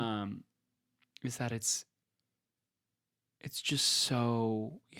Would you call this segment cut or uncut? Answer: uncut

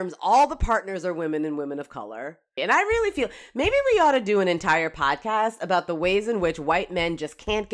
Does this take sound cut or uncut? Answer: cut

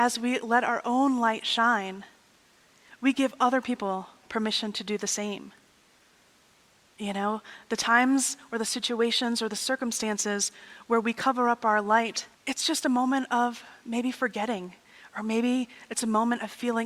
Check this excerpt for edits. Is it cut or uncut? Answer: cut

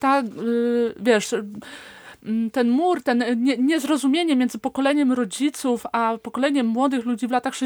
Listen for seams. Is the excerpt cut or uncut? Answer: uncut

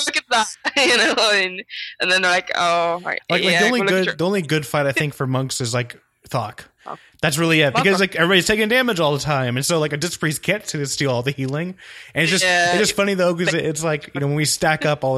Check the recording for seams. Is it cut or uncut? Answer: uncut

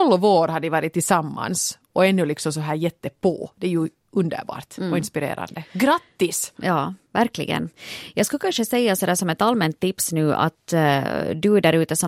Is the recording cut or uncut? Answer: uncut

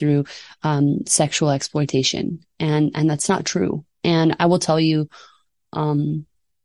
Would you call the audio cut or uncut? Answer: uncut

